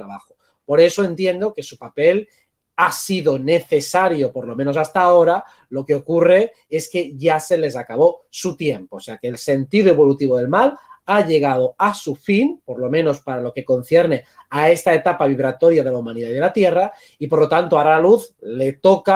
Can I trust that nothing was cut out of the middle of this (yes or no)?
yes